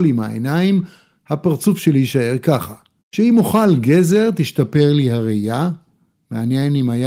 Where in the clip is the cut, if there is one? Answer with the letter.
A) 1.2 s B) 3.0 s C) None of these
B